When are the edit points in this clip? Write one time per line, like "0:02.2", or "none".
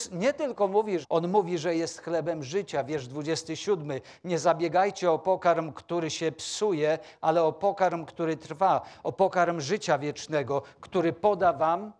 0:01.0